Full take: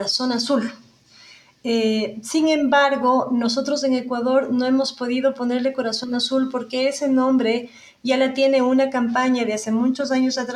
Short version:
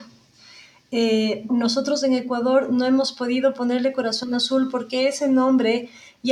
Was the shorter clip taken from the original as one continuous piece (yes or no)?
no